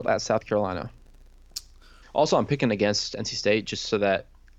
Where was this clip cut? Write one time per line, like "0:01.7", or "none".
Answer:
0:02.0